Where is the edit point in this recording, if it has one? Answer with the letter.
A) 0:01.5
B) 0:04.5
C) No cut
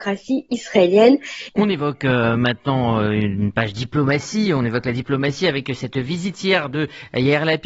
A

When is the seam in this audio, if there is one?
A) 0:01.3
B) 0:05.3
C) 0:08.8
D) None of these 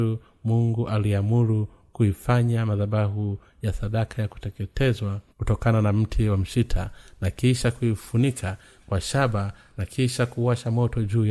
B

